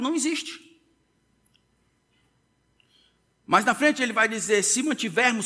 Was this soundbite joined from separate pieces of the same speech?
no; 0 cuts

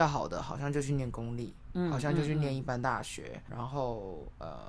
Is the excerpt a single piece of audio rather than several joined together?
no; 1 cut; at 3.5 s

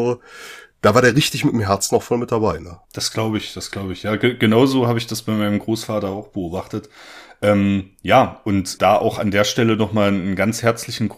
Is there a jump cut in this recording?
yes; 2 cuts; at 2.8 s, 8.8 s

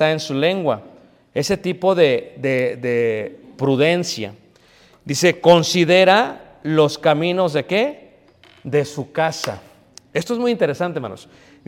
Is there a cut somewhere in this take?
no; 0 cuts

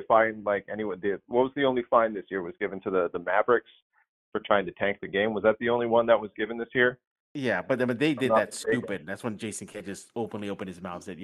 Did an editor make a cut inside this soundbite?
no; 0 cuts

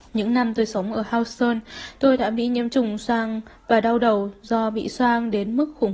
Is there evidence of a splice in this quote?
no; 0 cuts

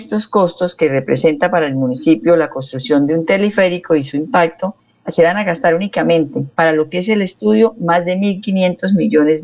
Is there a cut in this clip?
yes; 2 cuts; at 5.0 s, 6.5 s

